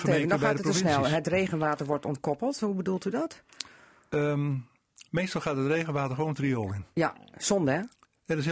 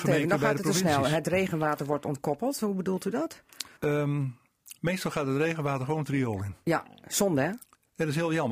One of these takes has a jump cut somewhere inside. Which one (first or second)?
second